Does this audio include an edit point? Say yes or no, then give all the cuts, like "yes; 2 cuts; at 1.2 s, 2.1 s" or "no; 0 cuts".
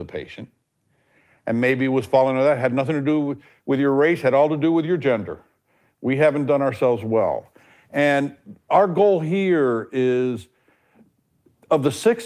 no; 0 cuts